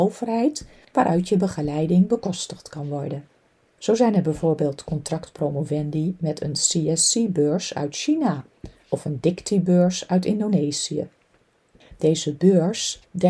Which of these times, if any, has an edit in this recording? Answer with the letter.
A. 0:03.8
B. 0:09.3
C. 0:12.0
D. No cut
A